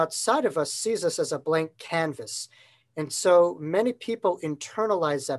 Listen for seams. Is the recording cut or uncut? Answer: uncut